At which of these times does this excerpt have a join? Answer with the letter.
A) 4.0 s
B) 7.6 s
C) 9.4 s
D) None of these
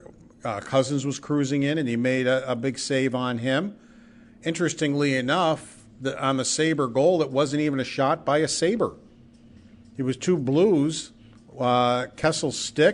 D